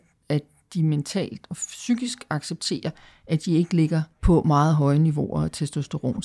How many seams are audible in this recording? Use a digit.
1